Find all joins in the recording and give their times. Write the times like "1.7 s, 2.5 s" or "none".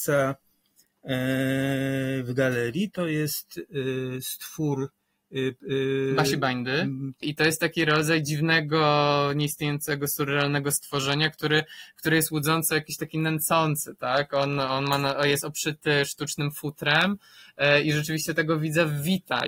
7.2 s